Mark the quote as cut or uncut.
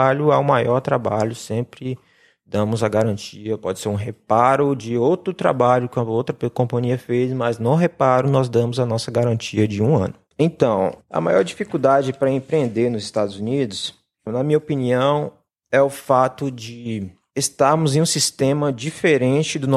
cut